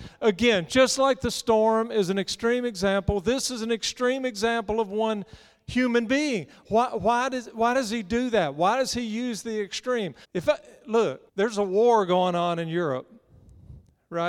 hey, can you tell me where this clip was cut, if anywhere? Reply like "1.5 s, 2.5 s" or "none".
10.2 s, 11.3 s